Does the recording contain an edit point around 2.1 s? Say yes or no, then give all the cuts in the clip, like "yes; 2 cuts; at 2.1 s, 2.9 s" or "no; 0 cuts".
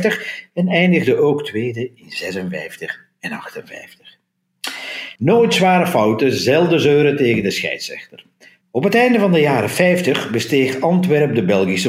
no; 2 cuts; at 5.2 s, 8.6 s